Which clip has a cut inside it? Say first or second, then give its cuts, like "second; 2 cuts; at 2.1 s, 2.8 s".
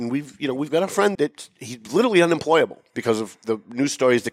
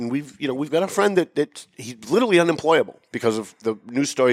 first; 1 cut; at 1.2 s